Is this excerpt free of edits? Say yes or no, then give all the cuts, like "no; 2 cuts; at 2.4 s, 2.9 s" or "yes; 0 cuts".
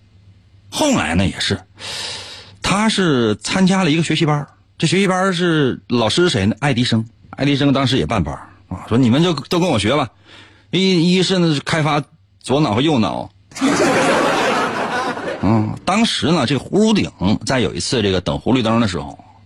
no; 1 cut; at 7.2 s